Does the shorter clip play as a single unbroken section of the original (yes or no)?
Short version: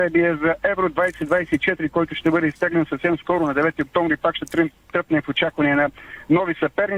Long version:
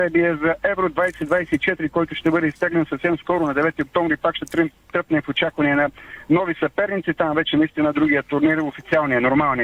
yes